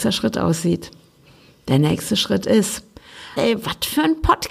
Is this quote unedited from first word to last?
no; 1 cut; at 3.4 s

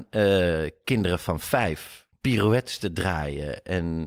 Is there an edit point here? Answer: no; 0 cuts

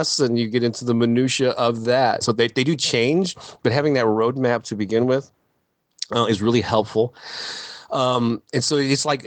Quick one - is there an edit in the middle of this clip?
yes; 1 cut; at 2.2 s

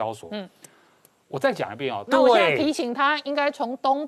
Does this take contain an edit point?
yes; 1 cut; at 2.1 s

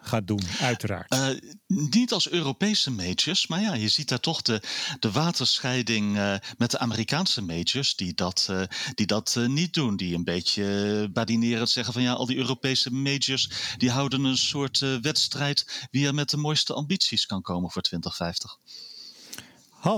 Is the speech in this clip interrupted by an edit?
no; 0 cuts

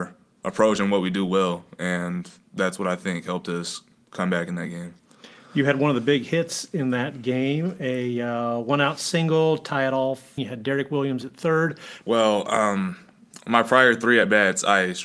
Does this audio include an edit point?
yes; 2 cuts; at 10.4 s, 12.0 s

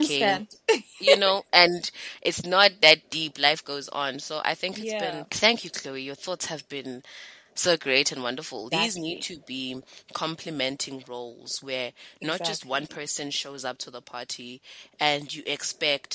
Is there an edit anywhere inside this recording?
yes; 2 cuts; at 5.3 s, 8.7 s

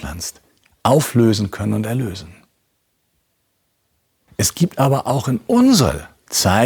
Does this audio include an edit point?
yes; 1 cut; at 4.3 s

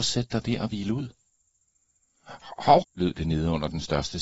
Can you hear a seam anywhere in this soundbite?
yes; 1 cut; at 2.8 s

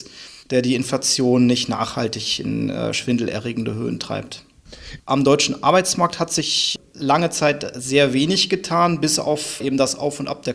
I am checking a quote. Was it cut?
yes; 1 cut; at 5.0 s

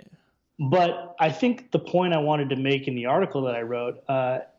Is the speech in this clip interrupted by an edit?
no; 0 cuts

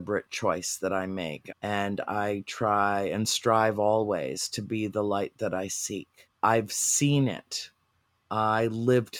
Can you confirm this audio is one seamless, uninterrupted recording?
no; 2 cuts; at 1.5 s, 6.3 s

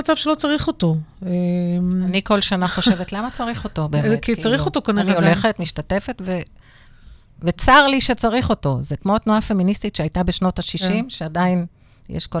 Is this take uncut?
yes; 0 cuts

